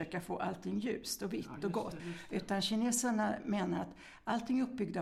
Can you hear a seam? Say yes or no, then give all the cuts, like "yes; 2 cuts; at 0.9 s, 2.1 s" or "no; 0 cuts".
yes; 1 cut; at 2.0 s